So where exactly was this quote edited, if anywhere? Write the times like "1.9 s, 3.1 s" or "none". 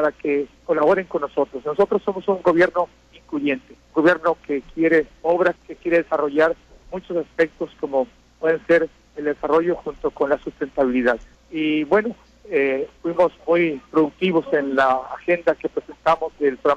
3.8 s, 5.6 s, 11.4 s